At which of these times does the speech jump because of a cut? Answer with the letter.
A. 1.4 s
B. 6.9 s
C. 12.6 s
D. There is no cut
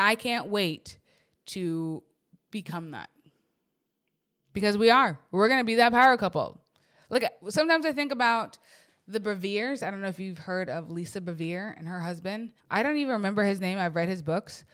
C